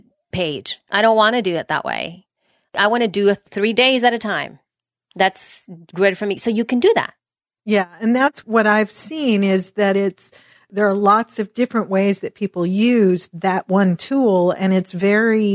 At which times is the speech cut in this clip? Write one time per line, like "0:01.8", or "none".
none